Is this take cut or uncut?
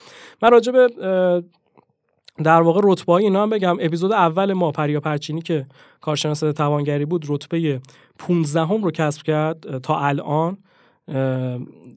uncut